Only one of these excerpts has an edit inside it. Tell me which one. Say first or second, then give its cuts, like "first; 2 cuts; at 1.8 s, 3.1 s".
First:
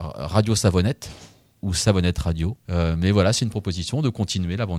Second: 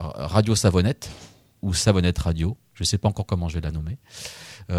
first; 1 cut; at 2.7 s